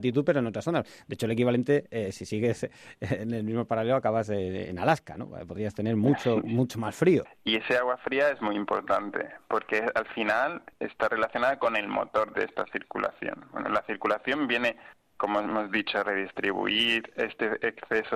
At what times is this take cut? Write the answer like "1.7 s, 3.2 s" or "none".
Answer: 7.3 s